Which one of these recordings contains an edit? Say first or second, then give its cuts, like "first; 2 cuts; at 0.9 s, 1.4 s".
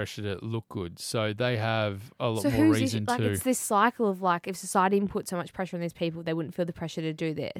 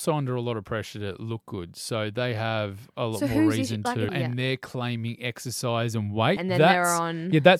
second; 2 cuts; at 4.1 s, 6.4 s